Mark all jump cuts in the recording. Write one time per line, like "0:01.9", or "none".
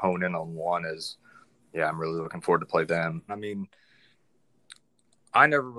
0:03.3